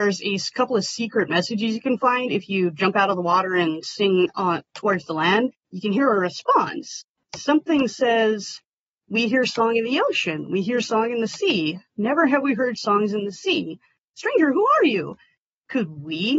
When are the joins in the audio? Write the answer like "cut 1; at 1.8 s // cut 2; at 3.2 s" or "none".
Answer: none